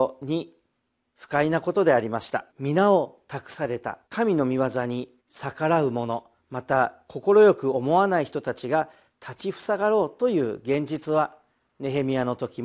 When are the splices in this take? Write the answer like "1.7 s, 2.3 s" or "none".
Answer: 2.5 s, 4.0 s, 5.2 s

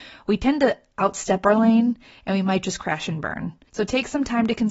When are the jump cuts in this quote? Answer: 3.7 s

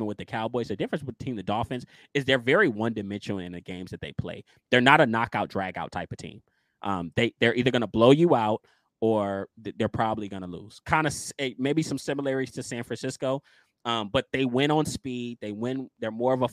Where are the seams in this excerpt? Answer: none

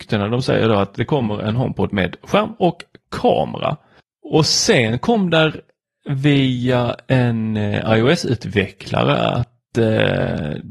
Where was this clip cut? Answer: none

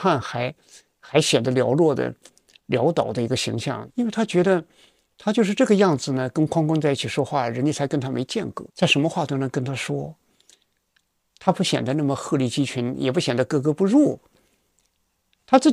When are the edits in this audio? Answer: 3.9 s, 8.7 s

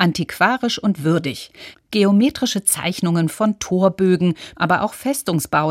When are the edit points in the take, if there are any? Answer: 1.7 s, 4.5 s

